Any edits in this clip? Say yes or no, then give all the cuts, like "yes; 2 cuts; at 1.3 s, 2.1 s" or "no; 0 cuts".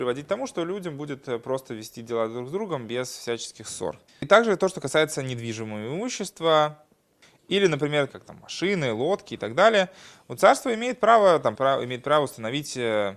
yes; 3 cuts; at 4.1 s, 8.1 s, 11.5 s